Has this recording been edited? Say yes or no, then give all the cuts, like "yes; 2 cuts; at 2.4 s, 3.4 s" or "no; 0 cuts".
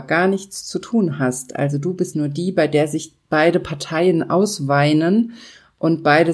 yes; 1 cut; at 2.1 s